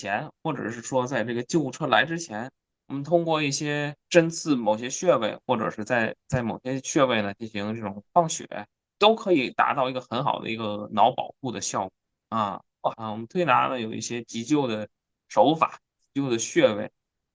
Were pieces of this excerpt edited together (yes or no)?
yes